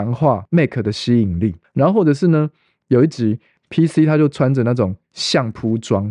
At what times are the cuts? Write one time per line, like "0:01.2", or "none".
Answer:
0:01.6

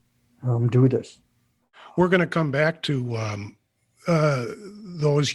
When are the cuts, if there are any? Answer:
none

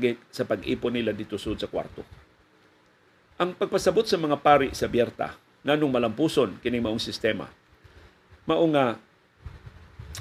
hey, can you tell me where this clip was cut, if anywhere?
none

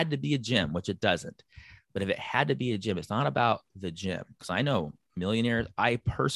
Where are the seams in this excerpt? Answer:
0:04.4

